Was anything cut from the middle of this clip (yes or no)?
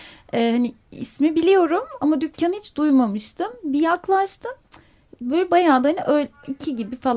no